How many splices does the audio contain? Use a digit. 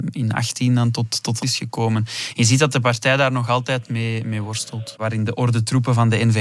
2